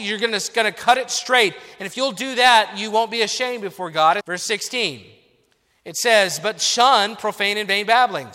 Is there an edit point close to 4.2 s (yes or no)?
yes